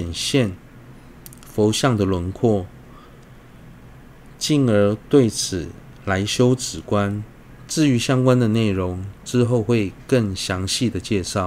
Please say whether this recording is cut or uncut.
uncut